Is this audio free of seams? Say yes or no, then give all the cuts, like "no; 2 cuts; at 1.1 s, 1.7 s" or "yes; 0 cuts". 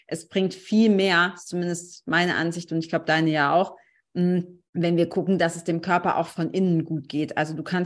no; 1 cut; at 4.7 s